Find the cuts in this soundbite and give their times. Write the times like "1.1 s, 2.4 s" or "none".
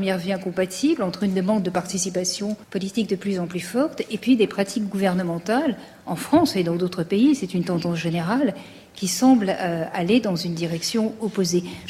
2.6 s